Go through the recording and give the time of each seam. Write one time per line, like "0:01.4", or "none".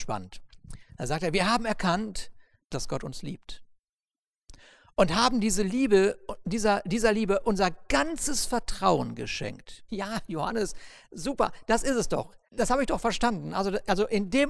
0:09.9
0:12.5